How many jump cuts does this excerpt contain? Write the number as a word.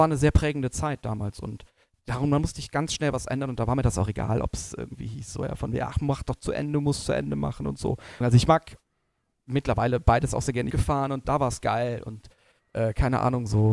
two